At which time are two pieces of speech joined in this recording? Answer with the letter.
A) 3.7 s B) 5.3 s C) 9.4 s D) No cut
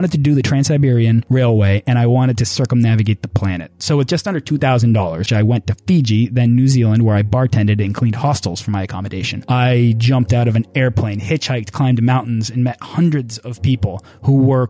B